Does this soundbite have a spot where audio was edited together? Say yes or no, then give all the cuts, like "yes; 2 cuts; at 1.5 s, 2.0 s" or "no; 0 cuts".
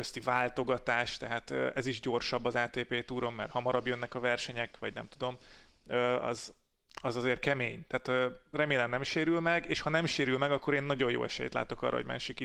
no; 0 cuts